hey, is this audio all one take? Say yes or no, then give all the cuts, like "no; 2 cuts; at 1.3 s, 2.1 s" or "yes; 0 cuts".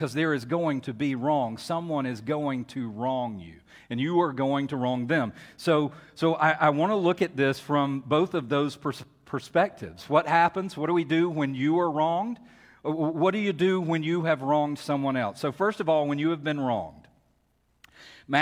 yes; 0 cuts